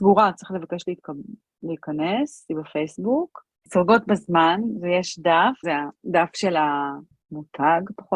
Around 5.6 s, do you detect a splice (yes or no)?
yes